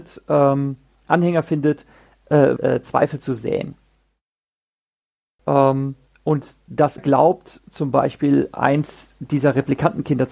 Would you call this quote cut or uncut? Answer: cut